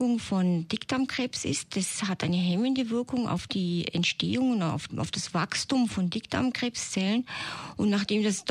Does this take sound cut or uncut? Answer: cut